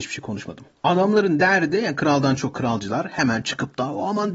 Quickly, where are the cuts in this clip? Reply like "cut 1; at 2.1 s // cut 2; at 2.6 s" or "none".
none